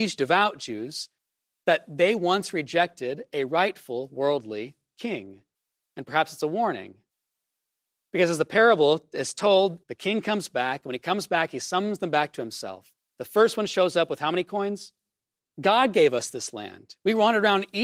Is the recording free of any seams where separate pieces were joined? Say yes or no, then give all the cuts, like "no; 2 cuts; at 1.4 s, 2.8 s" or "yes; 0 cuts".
no; 2 cuts; at 9.8 s, 15.4 s